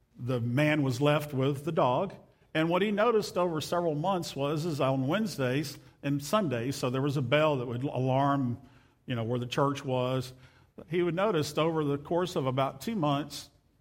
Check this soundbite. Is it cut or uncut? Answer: uncut